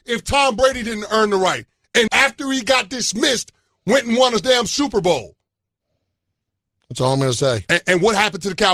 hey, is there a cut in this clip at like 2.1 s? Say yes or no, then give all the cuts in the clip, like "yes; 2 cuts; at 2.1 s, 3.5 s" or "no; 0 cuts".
yes; 2 cuts; at 2.1 s, 6.8 s